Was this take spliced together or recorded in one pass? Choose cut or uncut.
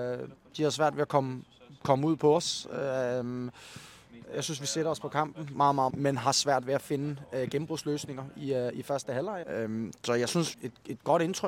cut